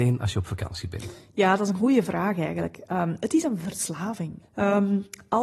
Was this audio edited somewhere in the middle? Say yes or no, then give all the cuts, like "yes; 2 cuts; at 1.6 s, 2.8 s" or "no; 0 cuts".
yes; 1 cut; at 4.4 s